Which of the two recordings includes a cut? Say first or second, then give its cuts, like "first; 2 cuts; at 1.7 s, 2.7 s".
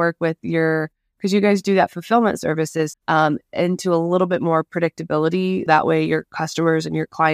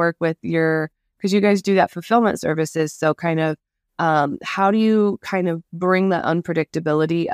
first; 2 cuts; at 2.9 s, 5.7 s